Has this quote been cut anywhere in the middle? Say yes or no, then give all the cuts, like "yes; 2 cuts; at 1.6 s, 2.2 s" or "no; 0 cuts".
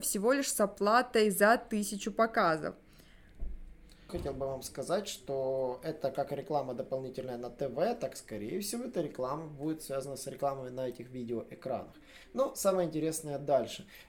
yes; 1 cut; at 4.1 s